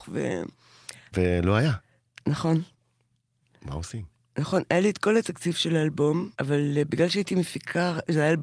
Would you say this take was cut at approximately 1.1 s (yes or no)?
yes